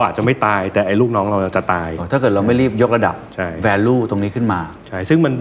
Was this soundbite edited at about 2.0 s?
yes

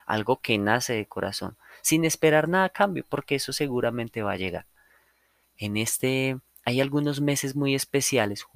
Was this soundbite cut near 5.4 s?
yes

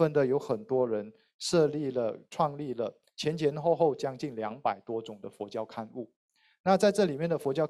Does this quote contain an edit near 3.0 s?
no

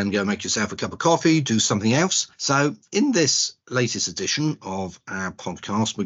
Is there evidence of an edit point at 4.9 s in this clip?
no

